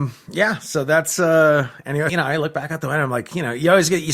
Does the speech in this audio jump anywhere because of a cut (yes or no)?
yes